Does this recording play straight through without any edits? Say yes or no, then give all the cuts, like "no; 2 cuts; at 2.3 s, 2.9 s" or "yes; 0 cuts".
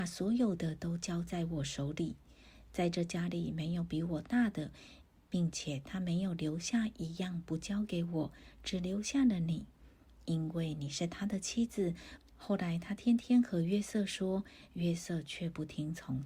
no; 1 cut; at 12.2 s